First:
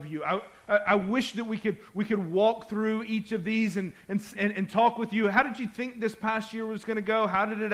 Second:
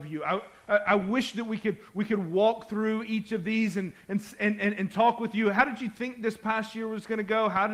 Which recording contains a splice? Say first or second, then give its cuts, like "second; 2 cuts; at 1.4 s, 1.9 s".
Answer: first; 1 cut; at 4.3 s